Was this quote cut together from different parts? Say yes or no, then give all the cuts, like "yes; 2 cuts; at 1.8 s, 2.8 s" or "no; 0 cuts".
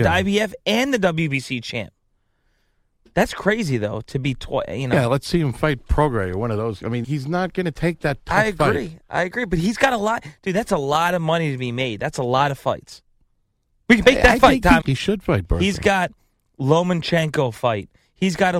yes; 2 cuts; at 7.0 s, 14.8 s